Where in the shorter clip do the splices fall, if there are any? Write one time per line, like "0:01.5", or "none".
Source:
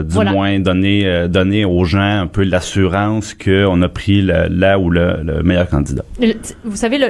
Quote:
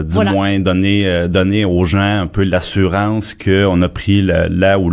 none